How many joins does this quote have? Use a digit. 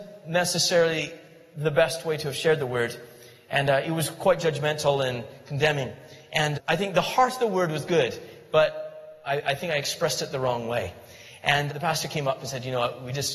2